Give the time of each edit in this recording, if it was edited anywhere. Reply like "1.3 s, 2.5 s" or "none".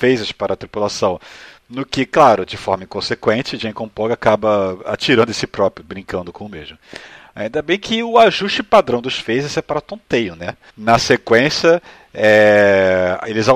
10.7 s